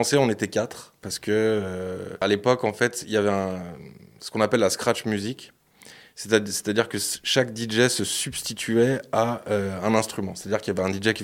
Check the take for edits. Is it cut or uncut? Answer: uncut